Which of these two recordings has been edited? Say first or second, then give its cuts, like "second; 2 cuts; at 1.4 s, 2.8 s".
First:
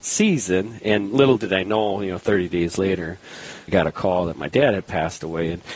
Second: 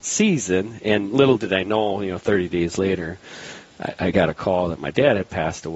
first; 1 cut; at 3.7 s